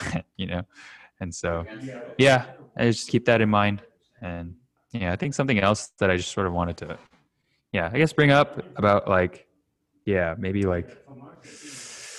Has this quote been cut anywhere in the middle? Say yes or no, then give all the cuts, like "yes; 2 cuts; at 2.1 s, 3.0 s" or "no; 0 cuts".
no; 0 cuts